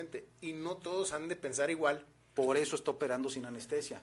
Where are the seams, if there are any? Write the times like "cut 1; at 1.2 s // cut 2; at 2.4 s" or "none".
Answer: cut 1; at 2.4 s

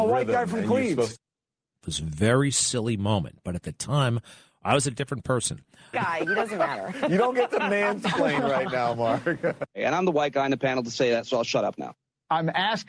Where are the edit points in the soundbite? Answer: cut 1; at 1.8 s // cut 2; at 5.9 s

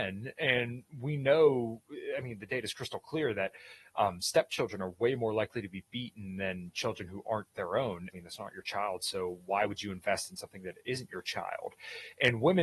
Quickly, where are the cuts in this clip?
cut 1; at 8.1 s

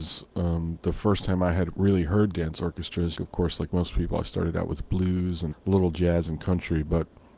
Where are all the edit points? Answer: cut 1; at 3.2 s // cut 2; at 5.5 s

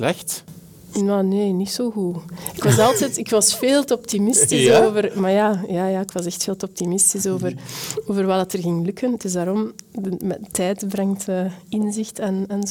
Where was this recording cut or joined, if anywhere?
none

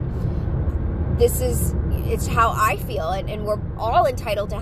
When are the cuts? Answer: cut 1; at 2.2 s

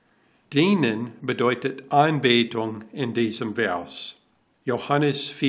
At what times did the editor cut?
cut 1; at 4.5 s

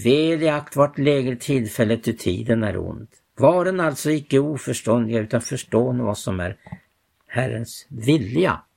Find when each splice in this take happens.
cut 1; at 3.3 s

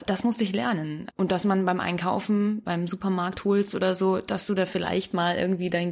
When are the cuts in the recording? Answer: cut 1; at 1.1 s // cut 2; at 2.6 s

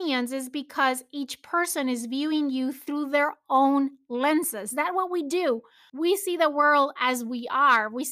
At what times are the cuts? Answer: cut 1; at 5.9 s

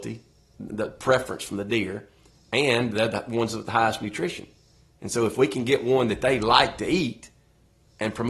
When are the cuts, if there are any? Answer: none

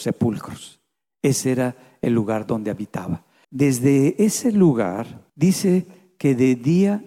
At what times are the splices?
cut 1; at 3.4 s // cut 2; at 5.3 s

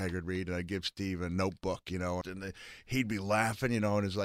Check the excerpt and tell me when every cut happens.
cut 1; at 2.2 s

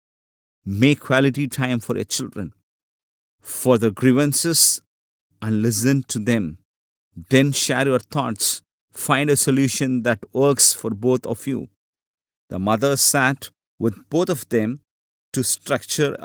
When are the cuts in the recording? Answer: cut 1; at 12.3 s

